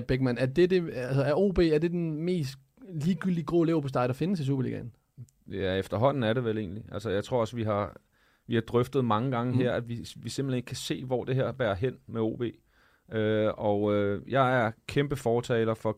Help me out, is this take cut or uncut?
uncut